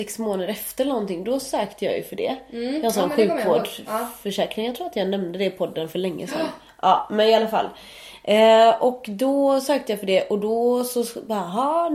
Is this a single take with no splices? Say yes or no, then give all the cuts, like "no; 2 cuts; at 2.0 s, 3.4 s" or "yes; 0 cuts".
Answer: yes; 0 cuts